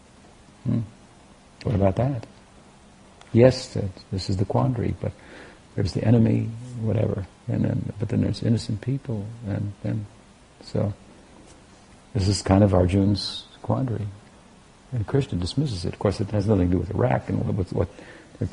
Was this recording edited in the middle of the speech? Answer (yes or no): no